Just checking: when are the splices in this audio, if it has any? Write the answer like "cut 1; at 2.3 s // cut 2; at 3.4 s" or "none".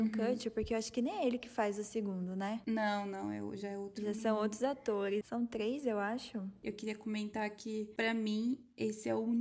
cut 1; at 5.2 s